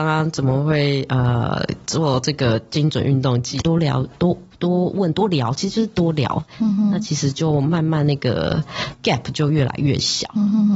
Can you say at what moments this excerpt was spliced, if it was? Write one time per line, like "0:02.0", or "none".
0:03.6